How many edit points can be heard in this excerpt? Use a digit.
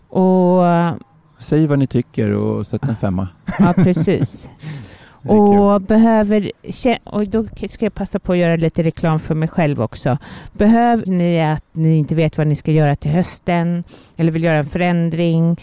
1